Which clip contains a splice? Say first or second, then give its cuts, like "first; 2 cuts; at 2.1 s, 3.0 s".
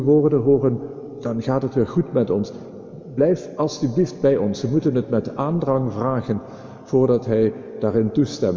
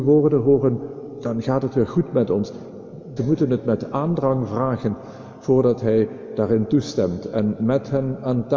second; 1 cut; at 3.2 s